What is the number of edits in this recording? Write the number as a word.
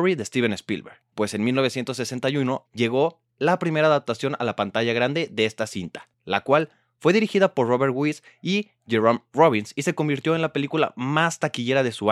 two